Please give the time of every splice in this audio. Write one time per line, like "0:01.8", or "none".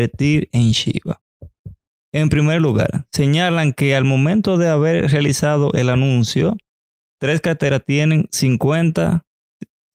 none